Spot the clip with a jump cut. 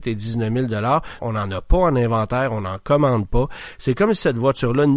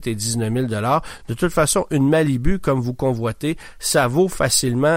first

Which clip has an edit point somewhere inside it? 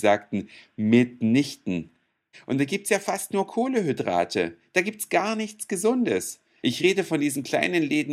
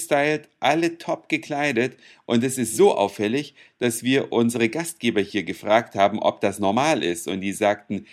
first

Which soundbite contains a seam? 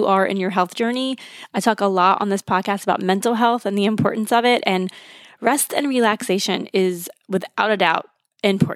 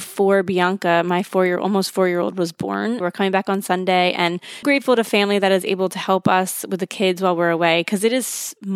second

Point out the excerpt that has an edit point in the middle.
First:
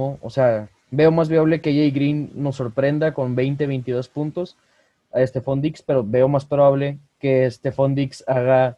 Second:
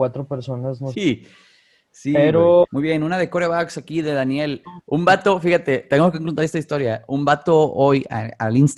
second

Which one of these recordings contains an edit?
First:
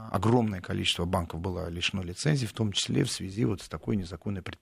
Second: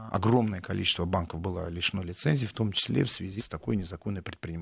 second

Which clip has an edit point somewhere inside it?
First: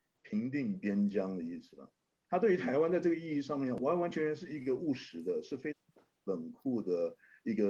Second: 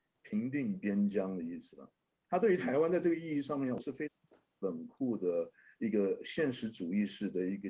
second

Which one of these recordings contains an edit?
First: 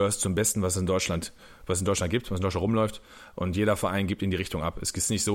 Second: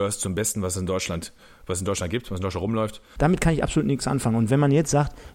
second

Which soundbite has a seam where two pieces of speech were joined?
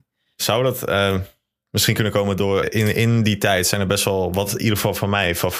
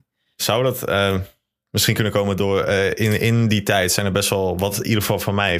first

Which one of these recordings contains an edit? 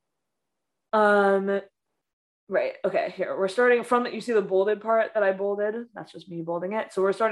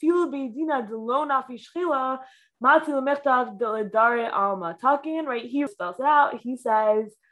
second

